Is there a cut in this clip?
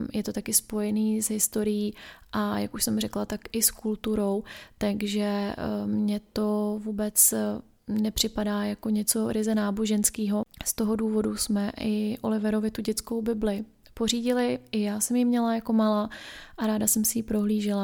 no; 0 cuts

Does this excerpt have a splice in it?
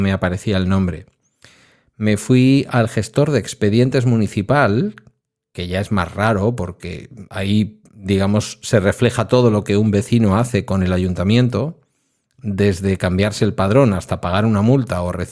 no; 0 cuts

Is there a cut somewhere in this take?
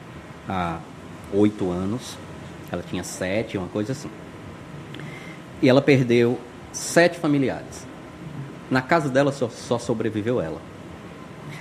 no; 0 cuts

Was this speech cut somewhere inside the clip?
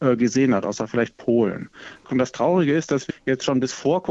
yes; 2 cuts; at 2.0 s, 3.1 s

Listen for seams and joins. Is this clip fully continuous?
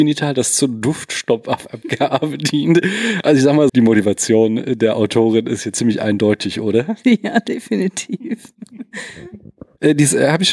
no; 1 cut; at 3.7 s

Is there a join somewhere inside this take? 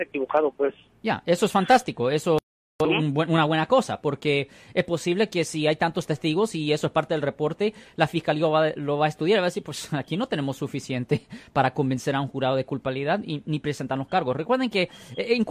no; 0 cuts

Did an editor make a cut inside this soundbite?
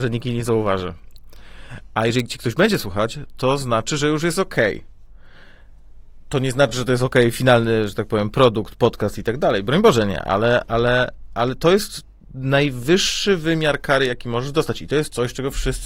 no; 0 cuts

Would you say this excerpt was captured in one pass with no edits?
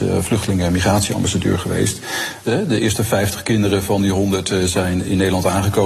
no; 1 cut; at 2.5 s

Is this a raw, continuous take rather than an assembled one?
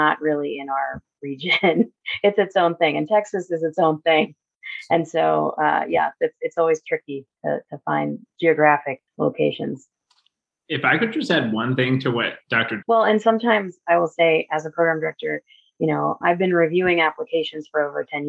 no; 3 cuts; at 9.1 s, 12.8 s, 16.2 s

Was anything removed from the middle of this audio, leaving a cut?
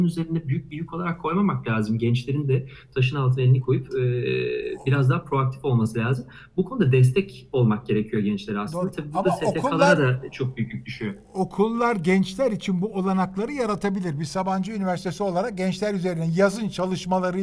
no; 0 cuts

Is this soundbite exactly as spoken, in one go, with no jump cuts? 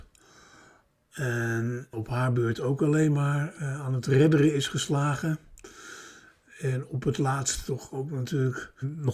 no; 1 cut; at 1.9 s

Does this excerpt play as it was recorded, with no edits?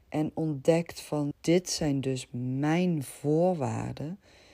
no; 1 cut; at 1.3 s

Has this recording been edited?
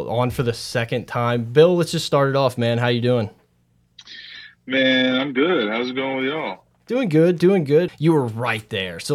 yes; 1 cut; at 7.9 s

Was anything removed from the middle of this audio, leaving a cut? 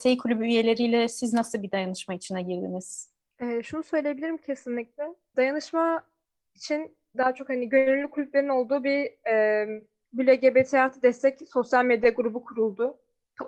yes; 1 cut; at 5.3 s

